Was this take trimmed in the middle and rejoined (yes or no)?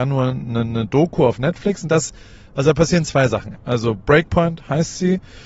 yes